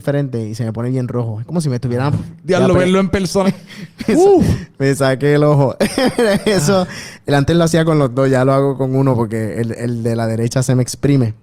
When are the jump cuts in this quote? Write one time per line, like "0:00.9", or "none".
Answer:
0:02.1
0:03.4